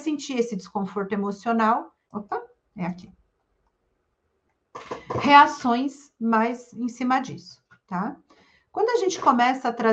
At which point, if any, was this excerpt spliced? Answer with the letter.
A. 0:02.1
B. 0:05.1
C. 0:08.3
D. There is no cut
A